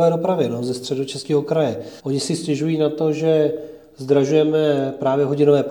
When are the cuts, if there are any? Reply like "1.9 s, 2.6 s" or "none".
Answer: 2.0 s